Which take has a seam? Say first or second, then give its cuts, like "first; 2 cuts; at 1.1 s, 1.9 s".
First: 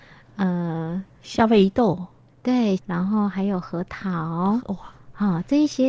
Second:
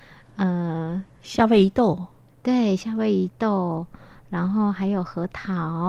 first; 1 cut; at 2.8 s